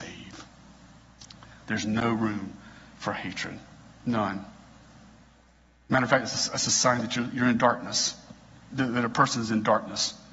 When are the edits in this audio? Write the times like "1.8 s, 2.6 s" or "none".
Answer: 8.7 s